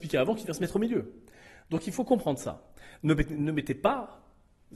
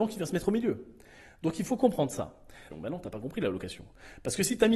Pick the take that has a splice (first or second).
second